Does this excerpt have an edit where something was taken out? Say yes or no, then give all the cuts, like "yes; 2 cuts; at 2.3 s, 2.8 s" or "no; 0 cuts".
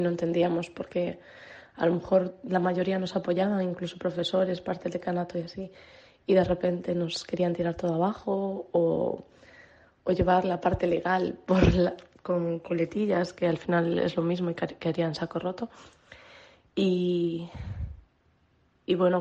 no; 0 cuts